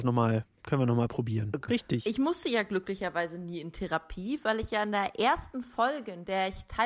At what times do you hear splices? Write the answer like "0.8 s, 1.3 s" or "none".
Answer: 1.7 s